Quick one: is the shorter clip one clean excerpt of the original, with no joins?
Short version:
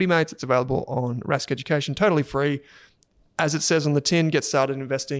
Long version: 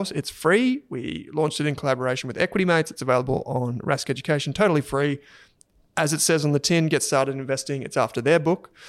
yes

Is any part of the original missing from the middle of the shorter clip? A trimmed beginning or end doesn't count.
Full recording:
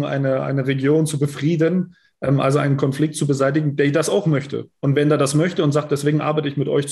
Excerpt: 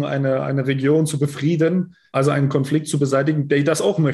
yes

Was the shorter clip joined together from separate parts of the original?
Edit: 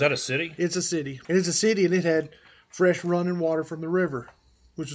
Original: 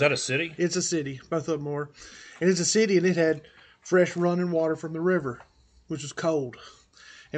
yes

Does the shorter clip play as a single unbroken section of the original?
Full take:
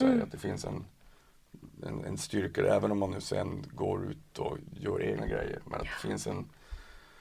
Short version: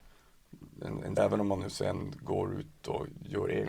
no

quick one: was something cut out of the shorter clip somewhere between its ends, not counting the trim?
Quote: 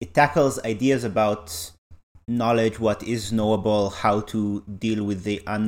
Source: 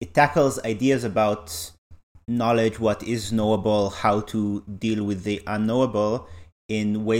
no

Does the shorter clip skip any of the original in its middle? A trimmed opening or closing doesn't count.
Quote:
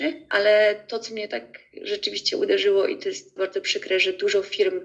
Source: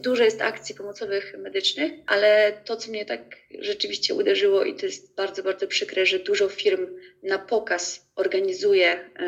yes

